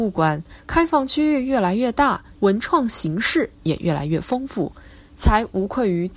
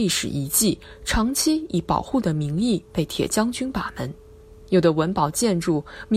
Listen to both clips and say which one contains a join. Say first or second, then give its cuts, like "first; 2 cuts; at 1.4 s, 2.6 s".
first; 1 cut; at 2.3 s